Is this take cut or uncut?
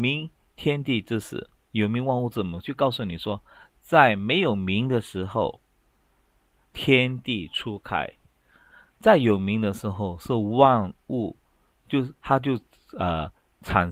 uncut